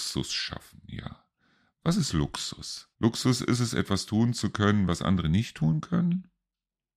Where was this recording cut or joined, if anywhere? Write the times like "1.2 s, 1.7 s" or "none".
1.7 s, 2.9 s